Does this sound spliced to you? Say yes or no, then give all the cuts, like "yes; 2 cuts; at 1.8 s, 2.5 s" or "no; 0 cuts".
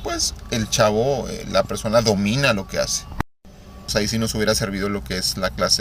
yes; 1 cut; at 3.9 s